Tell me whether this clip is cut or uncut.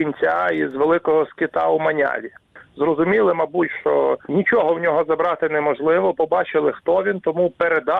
uncut